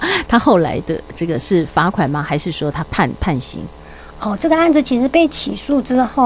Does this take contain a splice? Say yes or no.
no